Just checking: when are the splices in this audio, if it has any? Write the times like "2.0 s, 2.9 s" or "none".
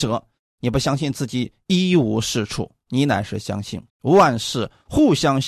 3.9 s